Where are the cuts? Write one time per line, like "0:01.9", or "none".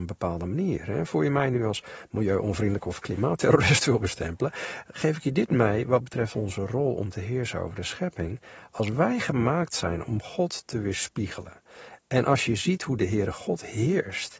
none